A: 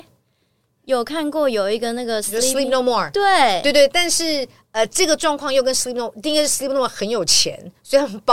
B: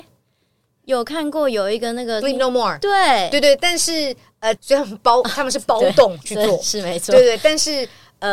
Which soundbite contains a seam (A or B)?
B